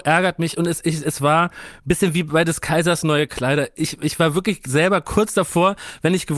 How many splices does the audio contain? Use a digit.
1